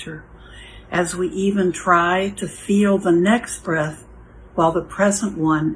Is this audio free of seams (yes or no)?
yes